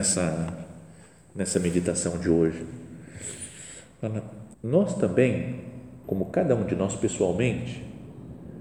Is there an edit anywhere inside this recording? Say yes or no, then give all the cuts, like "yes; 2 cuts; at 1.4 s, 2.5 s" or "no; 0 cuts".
yes; 2 cuts; at 4.5 s, 6.0 s